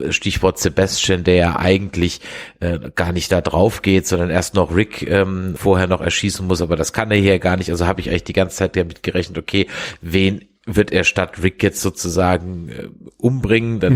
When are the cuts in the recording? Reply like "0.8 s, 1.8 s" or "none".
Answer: 5.6 s